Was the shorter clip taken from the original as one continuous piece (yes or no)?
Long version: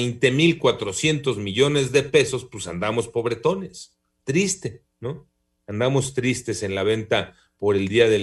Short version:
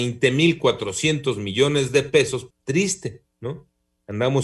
no